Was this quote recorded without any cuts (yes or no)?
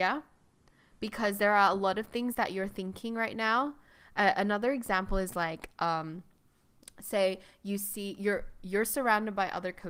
yes